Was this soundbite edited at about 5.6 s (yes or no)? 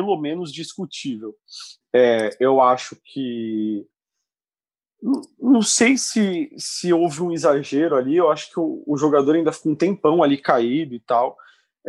no